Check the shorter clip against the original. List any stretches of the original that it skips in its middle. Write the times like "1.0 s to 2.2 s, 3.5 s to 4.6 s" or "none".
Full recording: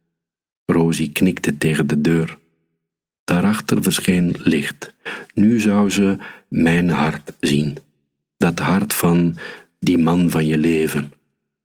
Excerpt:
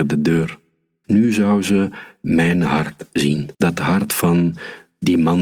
2.8 s to 5.3 s, 7.8 s to 8.3 s

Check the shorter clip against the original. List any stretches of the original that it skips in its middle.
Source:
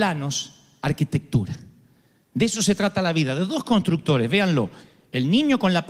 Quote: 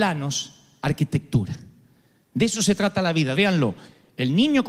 3.3 s to 4.3 s

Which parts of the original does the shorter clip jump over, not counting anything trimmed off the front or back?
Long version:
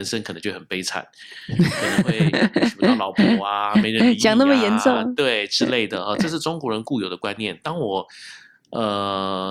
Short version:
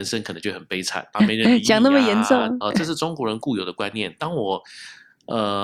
1.1 s to 3.7 s, 5.2 s to 6.0 s

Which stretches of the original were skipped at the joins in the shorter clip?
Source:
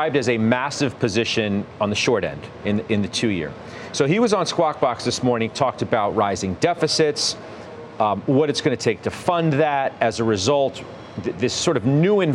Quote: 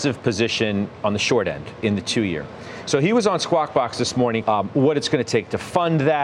2.6 s to 2.9 s, 5.5 s to 8.0 s

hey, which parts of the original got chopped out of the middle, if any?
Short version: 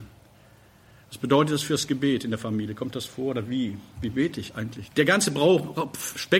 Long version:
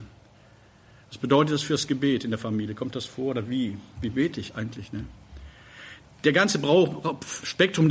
4.9 s to 6.2 s

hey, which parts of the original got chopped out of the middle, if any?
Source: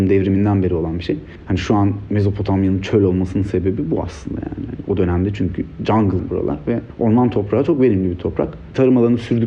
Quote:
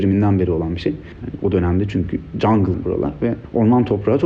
1.4 s to 4.7 s

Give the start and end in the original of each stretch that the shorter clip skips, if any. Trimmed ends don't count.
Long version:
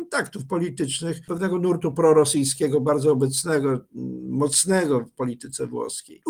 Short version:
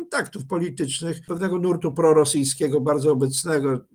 none

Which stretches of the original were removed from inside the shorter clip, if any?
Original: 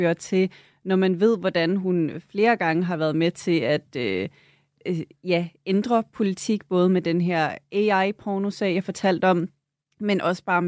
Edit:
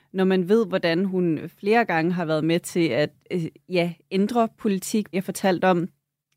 3.9 s to 4.7 s, 6.7 s to 8.7 s

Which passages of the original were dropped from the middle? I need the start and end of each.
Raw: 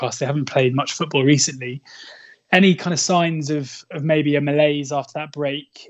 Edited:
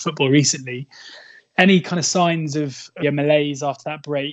4.0 s to 4.3 s

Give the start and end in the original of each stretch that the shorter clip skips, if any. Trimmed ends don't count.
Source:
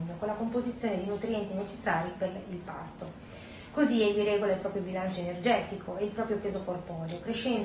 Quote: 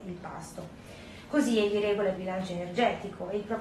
4.6 s to 4.8 s

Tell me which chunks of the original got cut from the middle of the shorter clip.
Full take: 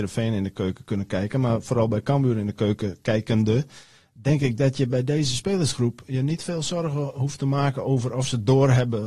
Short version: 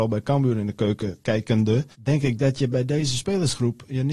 3.7 s to 4.1 s

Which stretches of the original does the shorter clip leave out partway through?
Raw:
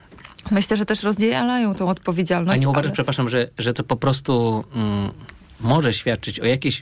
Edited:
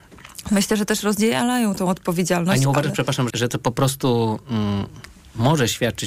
3.3 s to 3.5 s

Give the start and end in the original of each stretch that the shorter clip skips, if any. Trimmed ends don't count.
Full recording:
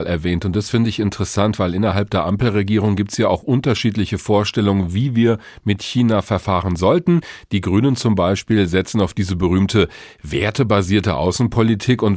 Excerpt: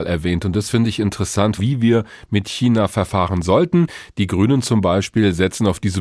1.6 s to 4.9 s

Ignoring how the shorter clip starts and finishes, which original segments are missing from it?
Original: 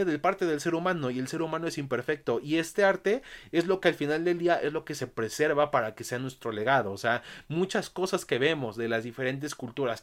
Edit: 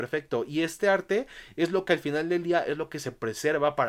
none

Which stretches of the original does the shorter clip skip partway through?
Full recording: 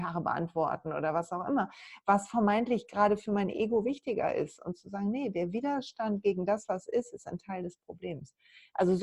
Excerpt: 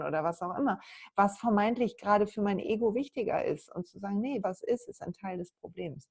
5.3 s to 6.7 s

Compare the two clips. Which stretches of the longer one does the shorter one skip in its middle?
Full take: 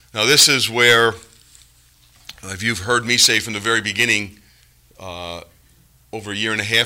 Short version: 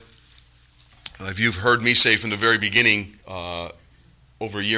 4.4 s to 4.9 s

